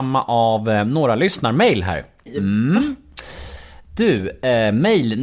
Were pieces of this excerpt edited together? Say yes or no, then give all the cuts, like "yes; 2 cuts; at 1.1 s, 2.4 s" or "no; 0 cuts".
yes; 1 cut; at 2.3 s